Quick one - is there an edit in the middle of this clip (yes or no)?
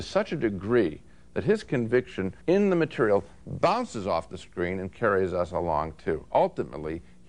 yes